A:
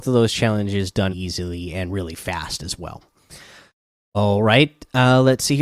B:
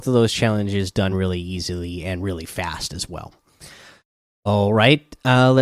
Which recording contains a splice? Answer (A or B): A